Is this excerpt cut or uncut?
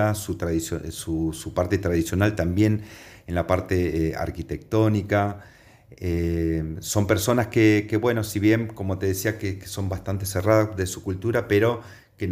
uncut